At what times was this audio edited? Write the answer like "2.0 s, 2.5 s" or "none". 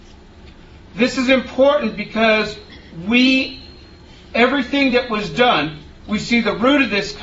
none